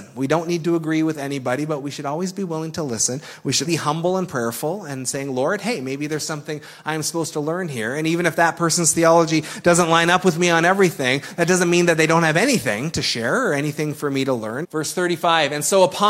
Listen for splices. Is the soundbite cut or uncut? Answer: cut